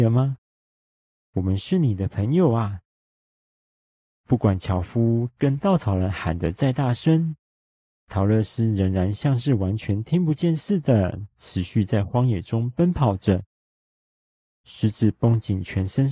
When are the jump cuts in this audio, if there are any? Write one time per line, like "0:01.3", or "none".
none